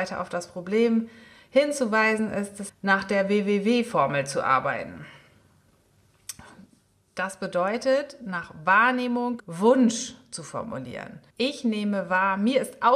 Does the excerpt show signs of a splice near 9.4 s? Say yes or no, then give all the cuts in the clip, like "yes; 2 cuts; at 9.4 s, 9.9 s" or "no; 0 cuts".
yes; 3 cuts; at 2.7 s, 9.4 s, 11.3 s